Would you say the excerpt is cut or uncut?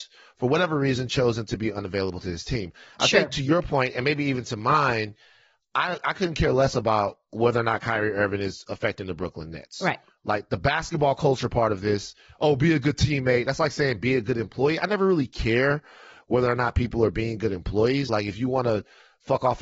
cut